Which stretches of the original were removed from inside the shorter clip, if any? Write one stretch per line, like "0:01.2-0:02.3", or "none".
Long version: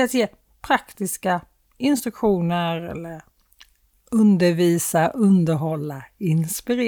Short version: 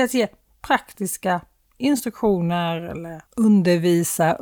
0:03.3-0:04.0